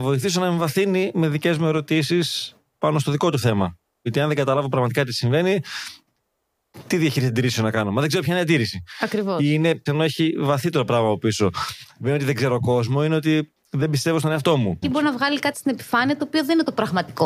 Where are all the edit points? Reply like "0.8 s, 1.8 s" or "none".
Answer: 9.9 s, 14.8 s